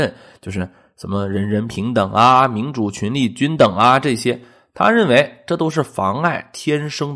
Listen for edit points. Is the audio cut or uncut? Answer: uncut